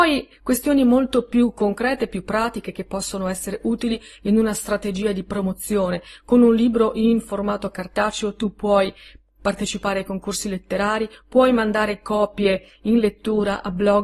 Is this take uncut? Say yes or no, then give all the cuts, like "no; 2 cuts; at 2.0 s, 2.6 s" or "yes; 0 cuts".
yes; 0 cuts